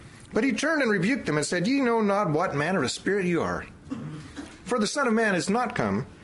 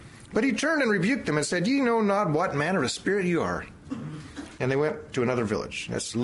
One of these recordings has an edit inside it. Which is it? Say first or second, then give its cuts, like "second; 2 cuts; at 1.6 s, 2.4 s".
second; 1 cut; at 4.6 s